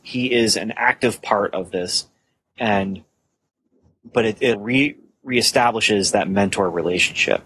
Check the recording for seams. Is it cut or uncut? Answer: cut